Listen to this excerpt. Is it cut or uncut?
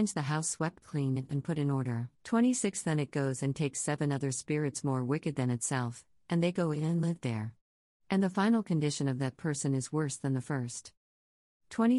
cut